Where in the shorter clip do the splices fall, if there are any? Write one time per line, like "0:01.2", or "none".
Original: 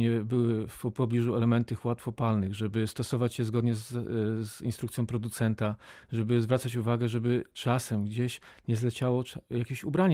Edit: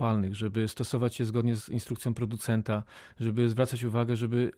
0:01.6